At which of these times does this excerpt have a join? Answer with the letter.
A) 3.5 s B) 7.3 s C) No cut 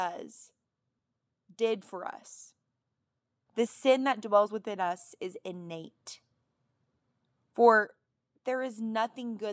A